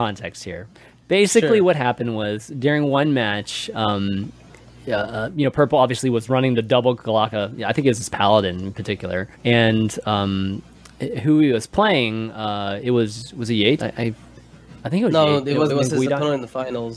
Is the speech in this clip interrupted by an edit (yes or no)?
yes